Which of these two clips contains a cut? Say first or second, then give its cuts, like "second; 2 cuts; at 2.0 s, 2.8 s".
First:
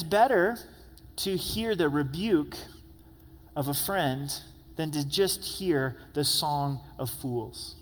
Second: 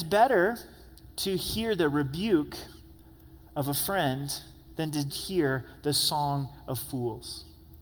second; 1 cut; at 5.1 s